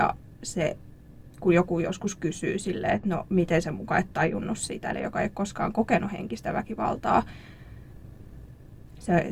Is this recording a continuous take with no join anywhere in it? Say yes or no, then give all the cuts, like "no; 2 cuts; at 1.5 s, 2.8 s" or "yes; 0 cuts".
no; 1 cut; at 4.9 s